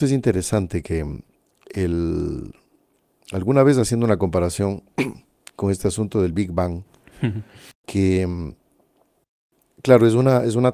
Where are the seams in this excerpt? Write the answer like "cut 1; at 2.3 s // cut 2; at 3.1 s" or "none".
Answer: cut 1; at 7.7 s